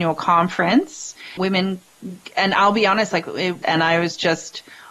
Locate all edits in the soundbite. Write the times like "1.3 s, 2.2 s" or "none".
1.4 s, 3.6 s